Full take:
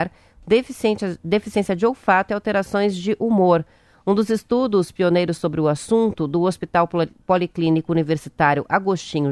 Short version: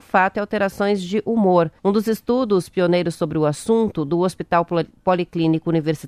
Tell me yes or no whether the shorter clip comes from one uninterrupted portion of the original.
no